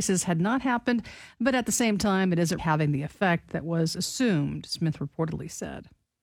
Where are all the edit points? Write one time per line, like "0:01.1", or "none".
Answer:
0:02.6